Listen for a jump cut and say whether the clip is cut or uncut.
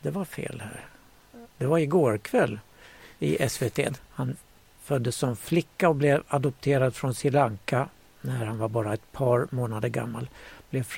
cut